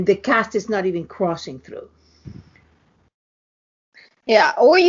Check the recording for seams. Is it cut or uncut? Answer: uncut